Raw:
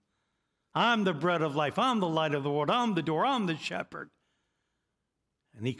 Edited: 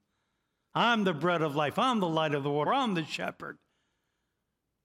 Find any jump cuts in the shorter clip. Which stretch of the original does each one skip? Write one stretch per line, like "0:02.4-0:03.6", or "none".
0:02.7-0:03.2